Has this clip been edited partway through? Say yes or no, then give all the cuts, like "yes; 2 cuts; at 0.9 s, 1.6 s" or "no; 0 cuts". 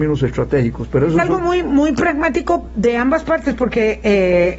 no; 0 cuts